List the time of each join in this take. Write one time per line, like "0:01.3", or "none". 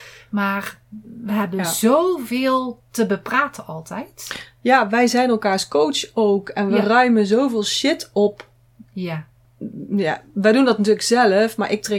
none